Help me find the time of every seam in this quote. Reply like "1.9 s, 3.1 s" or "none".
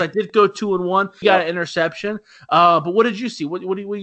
1.2 s

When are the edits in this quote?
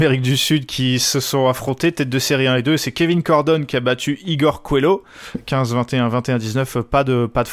5.3 s

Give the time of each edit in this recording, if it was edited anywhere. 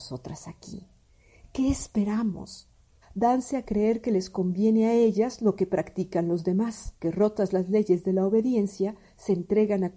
3.0 s, 7.0 s

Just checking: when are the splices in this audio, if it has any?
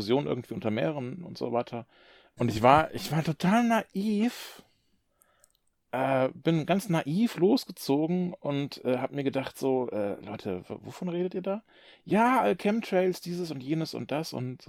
2.4 s

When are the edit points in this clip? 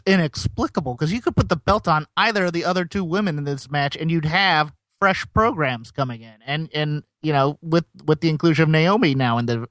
none

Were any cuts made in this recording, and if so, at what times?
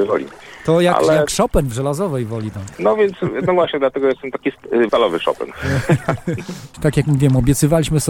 2.8 s, 4.9 s, 6.7 s

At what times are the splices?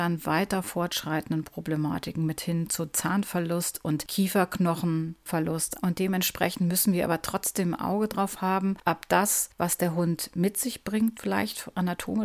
5.7 s, 11.1 s

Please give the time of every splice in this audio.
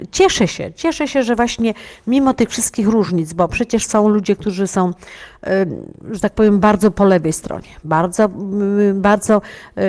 none

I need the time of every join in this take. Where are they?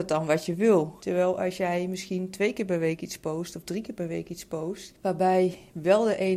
1.0 s, 4.9 s

